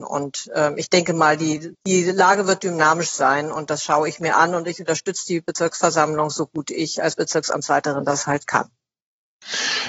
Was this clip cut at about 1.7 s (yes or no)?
yes